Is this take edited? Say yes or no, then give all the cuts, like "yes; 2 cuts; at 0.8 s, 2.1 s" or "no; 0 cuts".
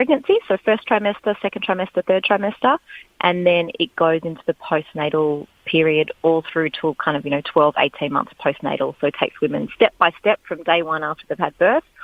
no; 0 cuts